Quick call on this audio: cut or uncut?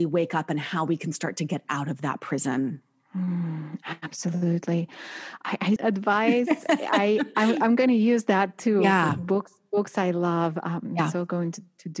cut